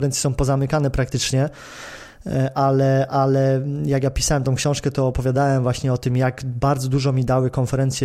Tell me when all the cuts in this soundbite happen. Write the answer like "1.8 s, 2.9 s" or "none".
none